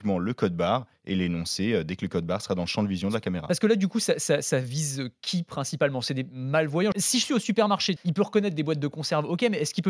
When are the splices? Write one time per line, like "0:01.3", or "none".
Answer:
0:06.9
0:08.0